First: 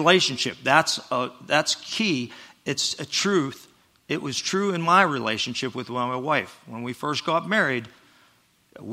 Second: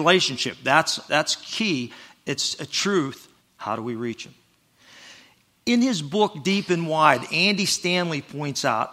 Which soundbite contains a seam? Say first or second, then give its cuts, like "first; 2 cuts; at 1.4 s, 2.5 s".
second; 2 cuts; at 1.1 s, 3.4 s